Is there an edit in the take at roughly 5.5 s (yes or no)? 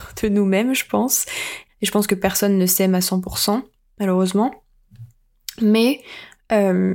no